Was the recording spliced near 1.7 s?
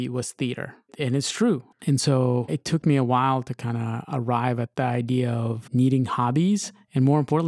yes; 1 cut; at 1.7 s

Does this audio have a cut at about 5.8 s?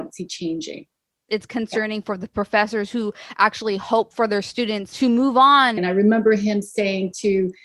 yes; 2 cuts; at 1.3 s, 5.8 s

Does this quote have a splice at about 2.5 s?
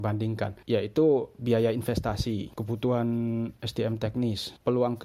yes; 1 cut; at 2.5 s

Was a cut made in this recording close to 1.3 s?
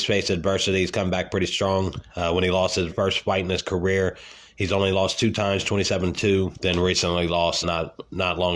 no; 3 cuts; at 2.9 s, 6.5 s, 7.6 s

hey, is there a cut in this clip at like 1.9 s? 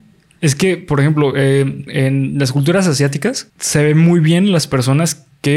yes; 2 cuts; at 1.9 s, 3.5 s

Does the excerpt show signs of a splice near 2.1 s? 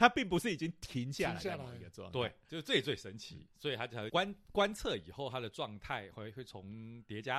no; 1 cut; at 4.1 s

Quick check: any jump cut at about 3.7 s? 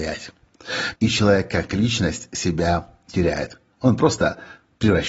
no; 1 cut; at 0.9 s

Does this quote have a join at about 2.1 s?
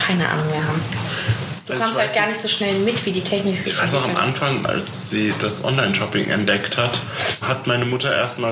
no; 2 cuts; at 4.6 s, 7.4 s

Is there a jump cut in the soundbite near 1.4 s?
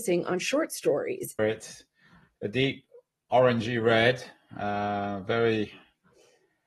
yes; 1 cut; at 1.4 s

